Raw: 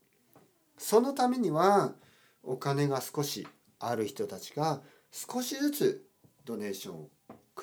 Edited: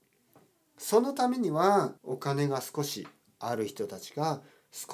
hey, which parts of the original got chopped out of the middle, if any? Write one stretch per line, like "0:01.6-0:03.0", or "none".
0:02.0-0:02.4